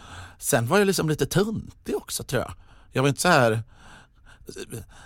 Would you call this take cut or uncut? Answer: uncut